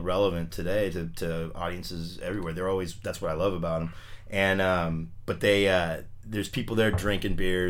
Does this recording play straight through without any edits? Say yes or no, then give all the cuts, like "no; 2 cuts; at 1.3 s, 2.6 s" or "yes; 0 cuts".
yes; 0 cuts